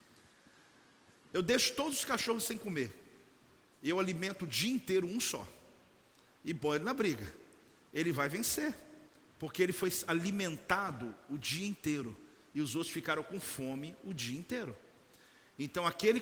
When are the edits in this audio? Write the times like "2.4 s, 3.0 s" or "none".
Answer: none